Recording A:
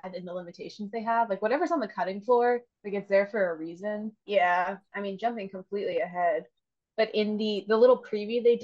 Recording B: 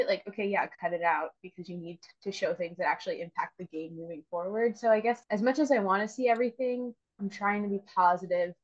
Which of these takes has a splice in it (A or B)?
A